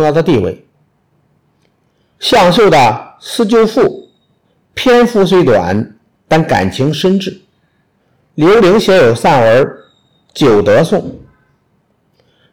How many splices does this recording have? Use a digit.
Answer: 0